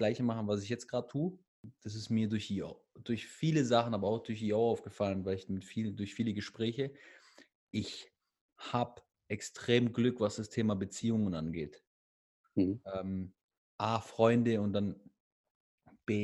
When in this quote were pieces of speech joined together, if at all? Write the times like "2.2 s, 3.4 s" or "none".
12.4 s